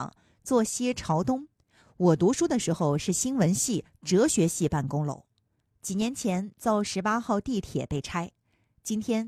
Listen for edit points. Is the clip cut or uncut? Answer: uncut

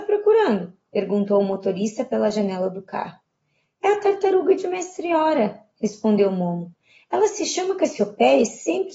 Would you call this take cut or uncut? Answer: uncut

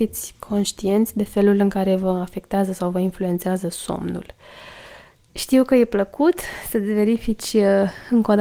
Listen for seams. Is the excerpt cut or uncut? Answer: cut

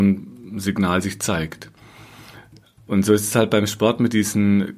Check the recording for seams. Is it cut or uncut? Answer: uncut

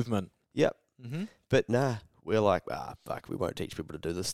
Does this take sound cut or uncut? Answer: uncut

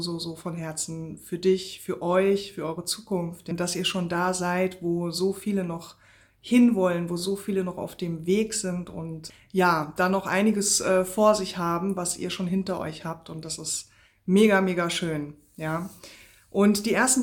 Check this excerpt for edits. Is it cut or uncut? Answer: uncut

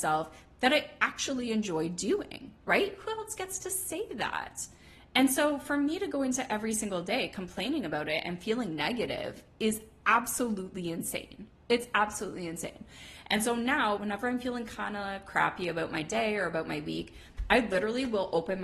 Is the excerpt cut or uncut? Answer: cut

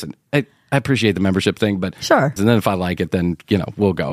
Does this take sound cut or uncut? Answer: cut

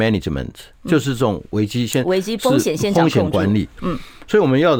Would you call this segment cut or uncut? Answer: cut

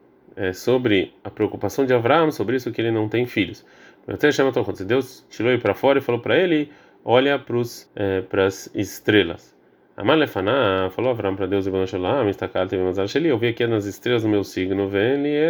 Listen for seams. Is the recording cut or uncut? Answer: cut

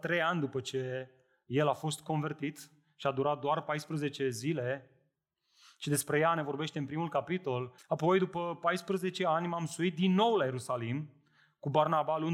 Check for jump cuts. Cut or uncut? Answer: cut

